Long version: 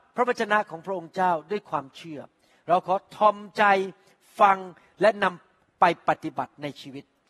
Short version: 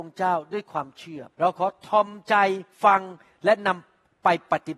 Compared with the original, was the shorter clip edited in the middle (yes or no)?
yes